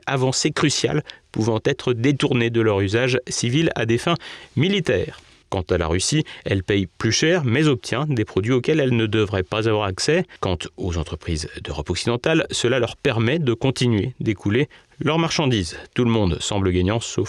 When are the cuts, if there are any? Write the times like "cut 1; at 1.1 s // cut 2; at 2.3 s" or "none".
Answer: cut 1; at 5.4 s